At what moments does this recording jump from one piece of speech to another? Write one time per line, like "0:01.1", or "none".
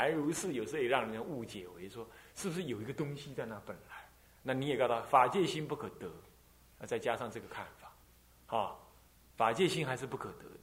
none